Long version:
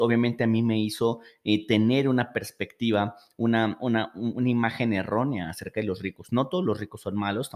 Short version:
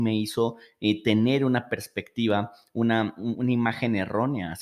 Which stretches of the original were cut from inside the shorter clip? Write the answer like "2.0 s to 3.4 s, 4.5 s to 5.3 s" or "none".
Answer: 3.8 s to 4.1 s